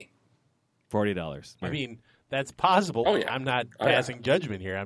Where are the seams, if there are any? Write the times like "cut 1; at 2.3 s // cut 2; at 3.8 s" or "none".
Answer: cut 1; at 1.6 s // cut 2; at 3.0 s